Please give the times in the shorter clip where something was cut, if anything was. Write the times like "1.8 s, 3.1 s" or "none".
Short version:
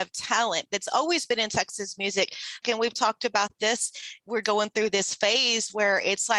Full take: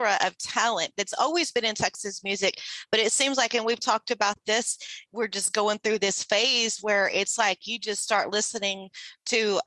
2.6 s, 4.4 s